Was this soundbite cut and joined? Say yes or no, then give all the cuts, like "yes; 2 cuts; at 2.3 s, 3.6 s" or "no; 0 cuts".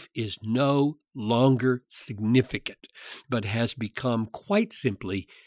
no; 0 cuts